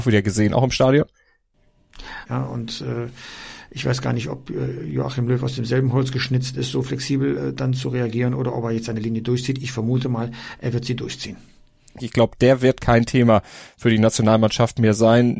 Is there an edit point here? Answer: yes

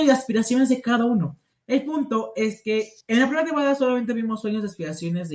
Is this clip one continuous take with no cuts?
no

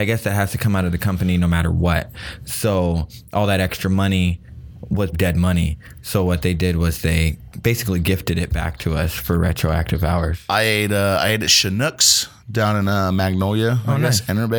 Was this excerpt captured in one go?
no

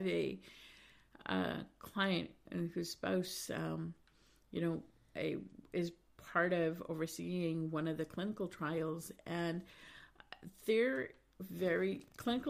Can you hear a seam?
no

